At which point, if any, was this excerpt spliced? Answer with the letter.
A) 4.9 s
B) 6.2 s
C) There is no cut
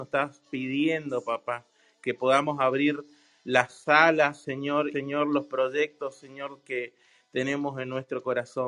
A